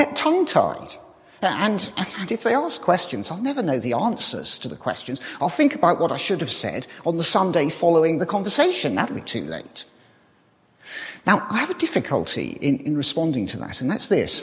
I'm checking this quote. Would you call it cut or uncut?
uncut